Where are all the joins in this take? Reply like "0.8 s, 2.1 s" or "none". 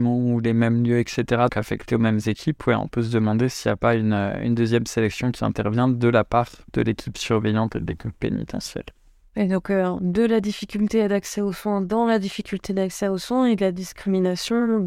1.5 s